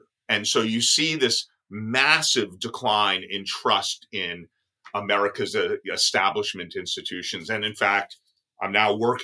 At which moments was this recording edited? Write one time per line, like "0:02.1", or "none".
none